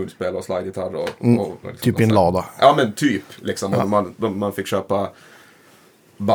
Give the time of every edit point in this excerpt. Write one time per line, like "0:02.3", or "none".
0:01.6